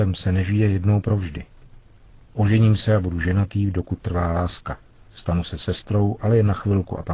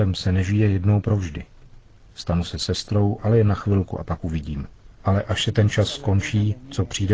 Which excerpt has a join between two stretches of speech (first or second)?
second